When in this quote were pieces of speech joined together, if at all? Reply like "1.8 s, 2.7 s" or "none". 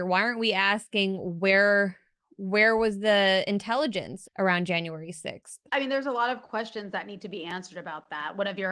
4.2 s, 5.7 s

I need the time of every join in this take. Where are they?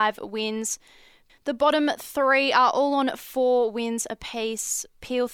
none

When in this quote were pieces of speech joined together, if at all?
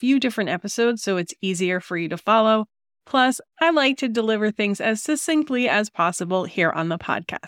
none

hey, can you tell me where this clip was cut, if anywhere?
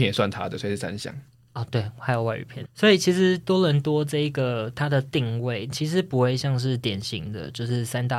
2.6 s

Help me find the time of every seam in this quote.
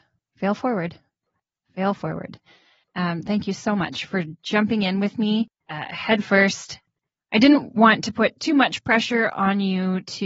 2.8 s

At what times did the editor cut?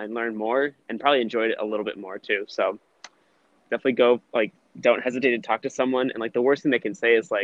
3.6 s

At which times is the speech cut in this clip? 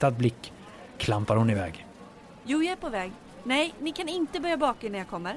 3.8 s

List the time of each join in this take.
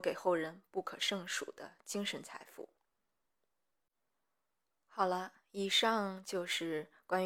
none

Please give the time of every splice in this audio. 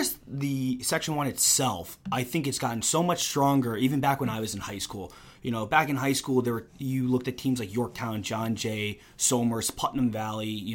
none

